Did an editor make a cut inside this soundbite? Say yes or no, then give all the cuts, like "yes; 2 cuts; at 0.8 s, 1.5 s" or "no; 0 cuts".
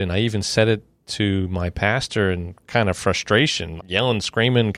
yes; 1 cut; at 3.8 s